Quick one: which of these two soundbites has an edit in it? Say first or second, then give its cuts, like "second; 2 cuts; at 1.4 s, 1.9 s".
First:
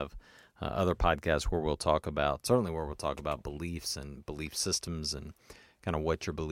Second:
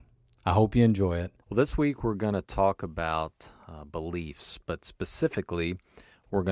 second; 1 cut; at 1.4 s